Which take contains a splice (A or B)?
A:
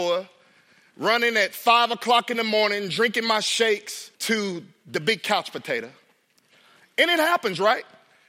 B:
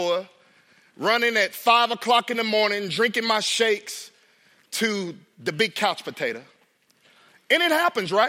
A